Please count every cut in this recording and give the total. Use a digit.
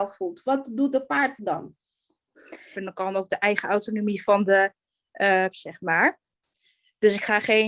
2